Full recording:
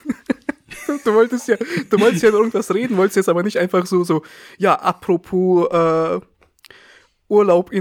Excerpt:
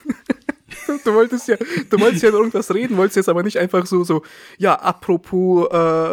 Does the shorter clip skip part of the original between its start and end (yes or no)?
no